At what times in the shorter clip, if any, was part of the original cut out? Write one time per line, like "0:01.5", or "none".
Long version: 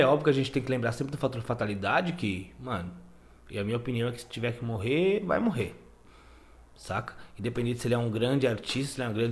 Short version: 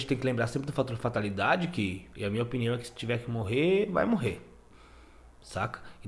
0:02.1